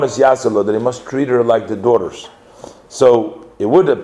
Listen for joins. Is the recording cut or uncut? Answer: uncut